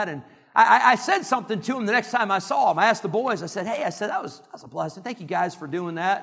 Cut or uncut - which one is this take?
uncut